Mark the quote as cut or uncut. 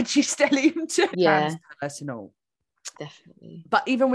cut